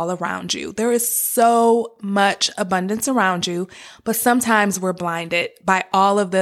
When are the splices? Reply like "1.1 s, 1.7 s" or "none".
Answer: none